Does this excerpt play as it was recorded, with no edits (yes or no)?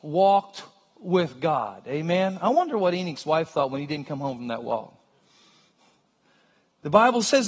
yes